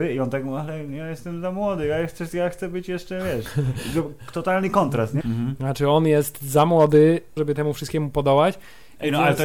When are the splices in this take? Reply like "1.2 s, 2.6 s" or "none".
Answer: 5.2 s, 7.4 s